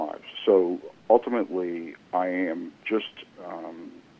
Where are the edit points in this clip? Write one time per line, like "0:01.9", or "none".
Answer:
0:02.0